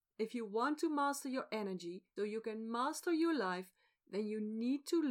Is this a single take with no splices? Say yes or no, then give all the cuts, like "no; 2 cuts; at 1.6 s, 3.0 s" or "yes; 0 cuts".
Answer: no; 1 cut; at 2.2 s